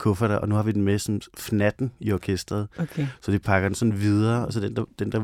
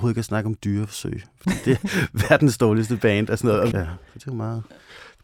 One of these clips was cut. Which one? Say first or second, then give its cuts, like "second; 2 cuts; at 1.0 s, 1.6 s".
second; 2 cuts; at 1.8 s, 3.7 s